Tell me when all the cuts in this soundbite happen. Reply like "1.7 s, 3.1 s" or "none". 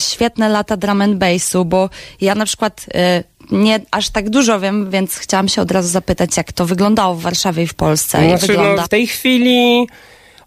8.8 s